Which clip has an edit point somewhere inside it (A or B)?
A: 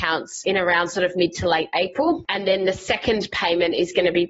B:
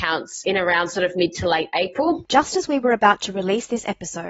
B